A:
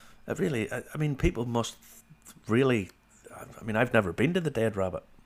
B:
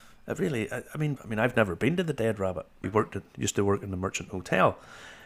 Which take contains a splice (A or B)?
B